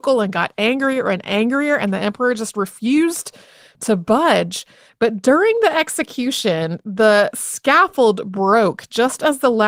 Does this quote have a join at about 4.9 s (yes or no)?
yes